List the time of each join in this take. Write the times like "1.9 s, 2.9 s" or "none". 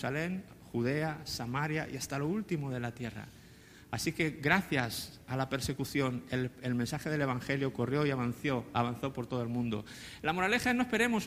none

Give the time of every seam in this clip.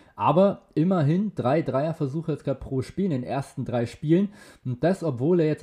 none

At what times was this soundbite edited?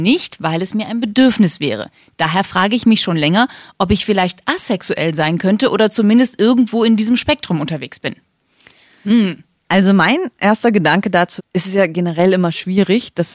11.4 s

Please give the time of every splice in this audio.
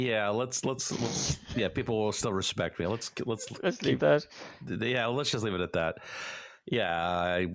4.0 s

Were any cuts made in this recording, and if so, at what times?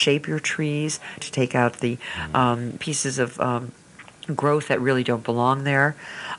1.2 s

